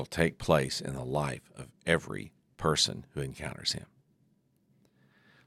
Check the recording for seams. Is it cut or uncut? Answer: uncut